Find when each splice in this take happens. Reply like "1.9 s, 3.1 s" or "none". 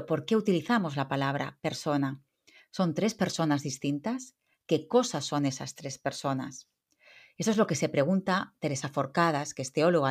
none